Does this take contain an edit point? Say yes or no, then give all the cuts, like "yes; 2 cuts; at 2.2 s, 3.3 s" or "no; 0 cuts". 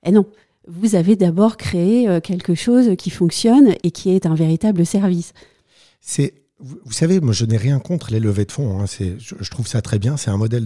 no; 0 cuts